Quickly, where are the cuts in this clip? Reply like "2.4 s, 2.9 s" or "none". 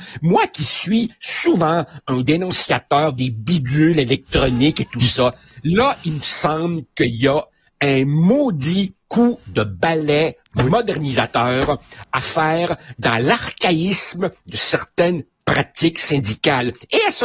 9.0 s